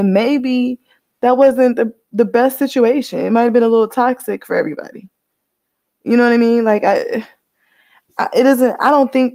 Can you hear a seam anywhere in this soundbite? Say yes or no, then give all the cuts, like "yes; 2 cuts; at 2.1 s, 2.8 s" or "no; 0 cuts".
no; 0 cuts